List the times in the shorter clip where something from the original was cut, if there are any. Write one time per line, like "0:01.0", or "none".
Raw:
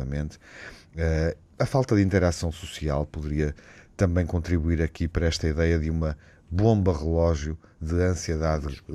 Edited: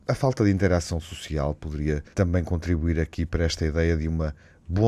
0:02.1